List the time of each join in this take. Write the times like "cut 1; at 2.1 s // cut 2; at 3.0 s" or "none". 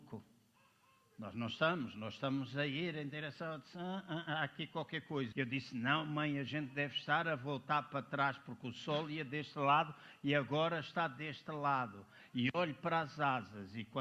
cut 1; at 4.3 s // cut 2; at 5.3 s